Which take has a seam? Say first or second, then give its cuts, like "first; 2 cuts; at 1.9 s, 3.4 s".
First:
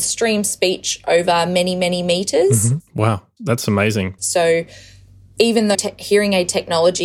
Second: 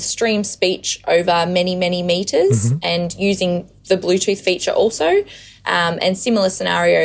first; 3 cuts; at 2.8 s, 4.2 s, 5.7 s